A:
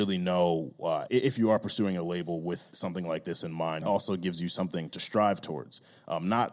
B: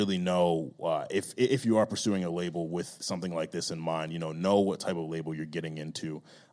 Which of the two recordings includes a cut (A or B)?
A